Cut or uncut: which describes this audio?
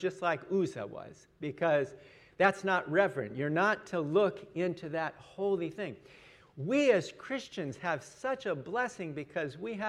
uncut